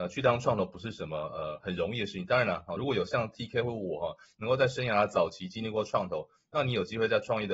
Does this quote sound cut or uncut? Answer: uncut